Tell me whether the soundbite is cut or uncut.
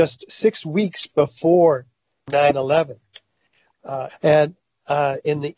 cut